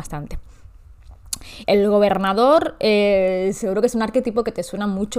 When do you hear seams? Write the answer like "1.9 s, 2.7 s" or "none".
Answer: 1.6 s